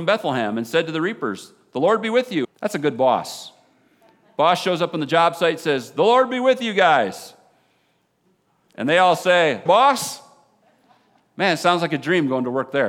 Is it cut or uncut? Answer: cut